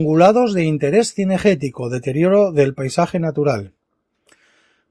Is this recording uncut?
yes; 0 cuts

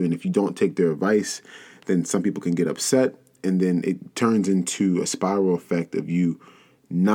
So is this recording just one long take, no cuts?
yes; 0 cuts

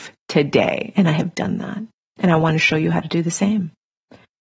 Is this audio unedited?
yes; 0 cuts

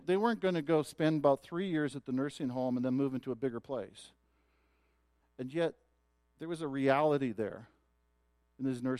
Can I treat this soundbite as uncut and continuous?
no; 1 cut; at 5.2 s

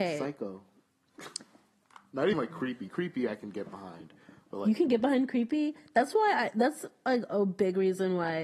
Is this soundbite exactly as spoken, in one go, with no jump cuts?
no; 1 cut; at 2.3 s

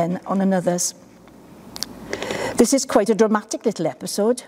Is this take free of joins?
yes; 0 cuts

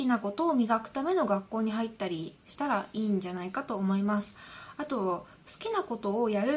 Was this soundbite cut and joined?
no; 0 cuts

